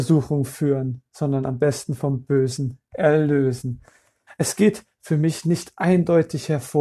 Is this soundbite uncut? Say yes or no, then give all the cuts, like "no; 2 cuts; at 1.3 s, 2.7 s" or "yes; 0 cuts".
no; 2 cuts; at 1.1 s, 4.3 s